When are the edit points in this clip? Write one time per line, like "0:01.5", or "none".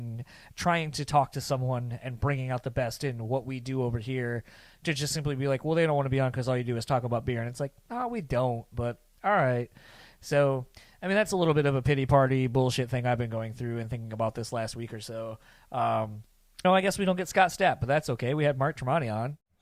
0:16.6